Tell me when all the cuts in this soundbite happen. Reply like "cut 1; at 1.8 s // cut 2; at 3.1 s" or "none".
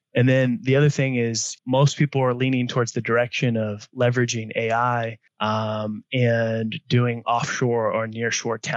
cut 1; at 1.6 s // cut 2; at 5.3 s